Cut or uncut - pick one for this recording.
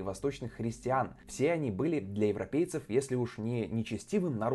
uncut